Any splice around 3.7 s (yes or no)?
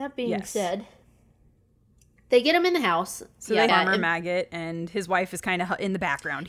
yes